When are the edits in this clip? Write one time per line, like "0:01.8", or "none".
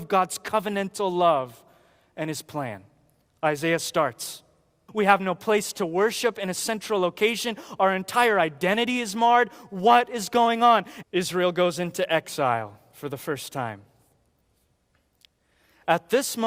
0:04.9
0:11.0